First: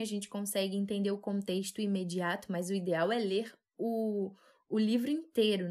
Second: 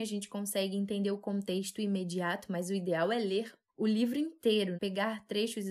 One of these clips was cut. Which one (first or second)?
second